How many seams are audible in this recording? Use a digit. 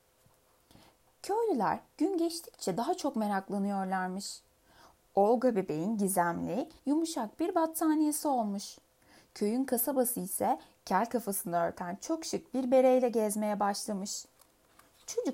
1